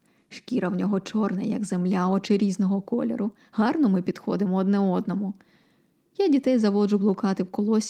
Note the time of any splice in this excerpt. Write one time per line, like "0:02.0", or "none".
none